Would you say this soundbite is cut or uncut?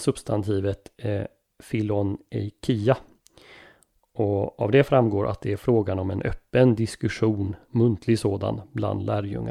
uncut